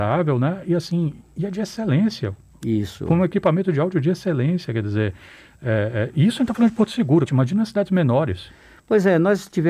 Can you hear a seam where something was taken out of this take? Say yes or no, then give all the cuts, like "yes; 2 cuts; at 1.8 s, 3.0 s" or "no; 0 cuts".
yes; 1 cut; at 7.3 s